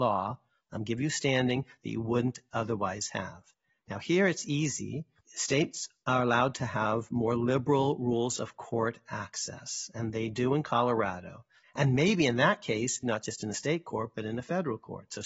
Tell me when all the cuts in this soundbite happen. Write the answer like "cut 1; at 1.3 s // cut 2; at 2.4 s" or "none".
cut 1; at 11.6 s // cut 2; at 13.0 s